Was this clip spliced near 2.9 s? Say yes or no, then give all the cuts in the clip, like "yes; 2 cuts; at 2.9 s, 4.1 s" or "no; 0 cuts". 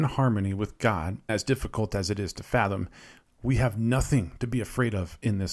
no; 1 cut; at 1.3 s